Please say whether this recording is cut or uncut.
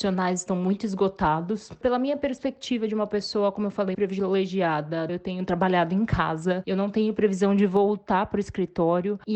cut